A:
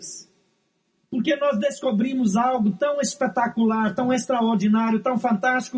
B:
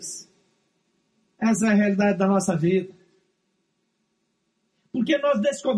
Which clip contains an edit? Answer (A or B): A